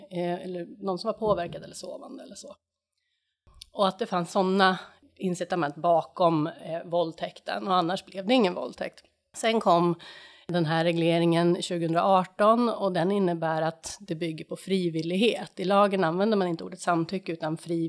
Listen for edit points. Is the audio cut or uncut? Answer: uncut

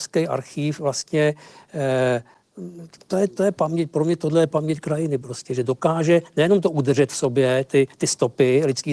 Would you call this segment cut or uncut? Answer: uncut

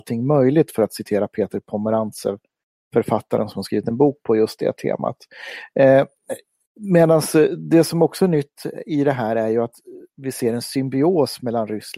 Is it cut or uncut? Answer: uncut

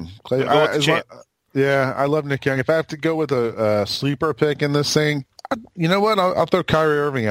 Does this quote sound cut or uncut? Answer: uncut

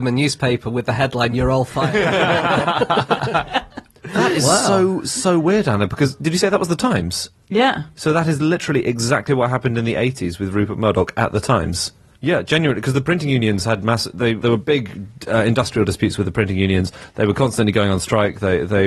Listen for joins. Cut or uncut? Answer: cut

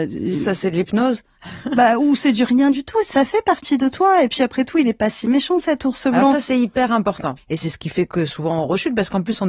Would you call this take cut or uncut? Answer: cut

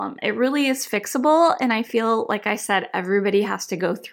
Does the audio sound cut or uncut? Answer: uncut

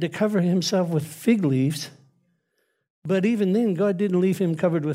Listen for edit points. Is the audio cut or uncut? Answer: uncut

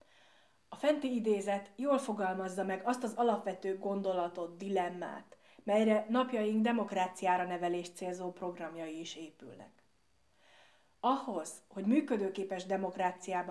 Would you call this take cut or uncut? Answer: uncut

